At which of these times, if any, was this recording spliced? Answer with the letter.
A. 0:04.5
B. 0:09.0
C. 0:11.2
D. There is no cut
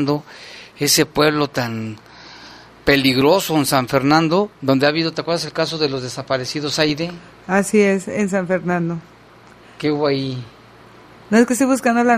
D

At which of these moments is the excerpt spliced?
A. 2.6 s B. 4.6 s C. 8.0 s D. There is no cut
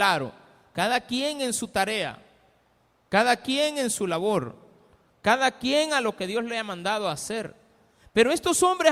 D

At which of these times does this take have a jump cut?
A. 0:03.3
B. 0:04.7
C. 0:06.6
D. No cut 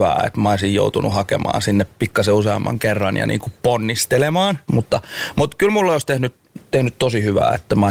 B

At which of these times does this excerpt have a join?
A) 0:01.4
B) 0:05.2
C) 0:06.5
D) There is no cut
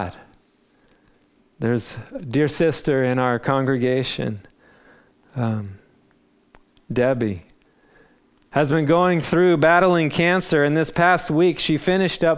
A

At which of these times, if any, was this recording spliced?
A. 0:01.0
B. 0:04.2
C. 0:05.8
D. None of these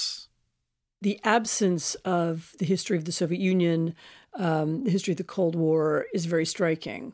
B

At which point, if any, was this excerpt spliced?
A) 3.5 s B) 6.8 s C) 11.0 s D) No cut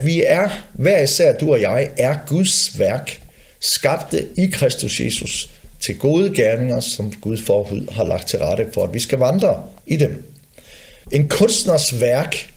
C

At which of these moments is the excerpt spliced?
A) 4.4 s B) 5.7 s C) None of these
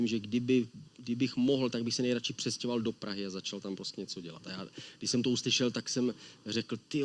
C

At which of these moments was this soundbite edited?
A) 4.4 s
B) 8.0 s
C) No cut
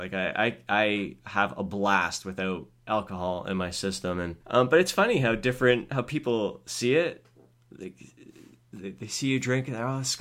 A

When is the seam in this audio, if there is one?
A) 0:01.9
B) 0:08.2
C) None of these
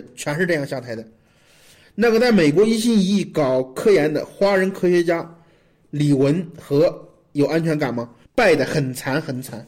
B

